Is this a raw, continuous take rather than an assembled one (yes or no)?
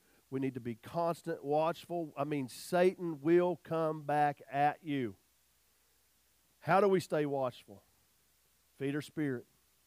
yes